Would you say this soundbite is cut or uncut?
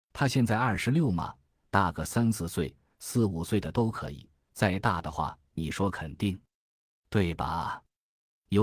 uncut